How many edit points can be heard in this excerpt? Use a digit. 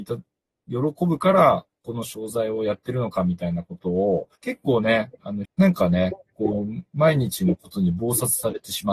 2